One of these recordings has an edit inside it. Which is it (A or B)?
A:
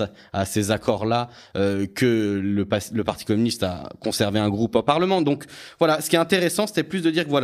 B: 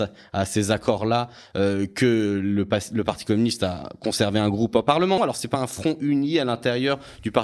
B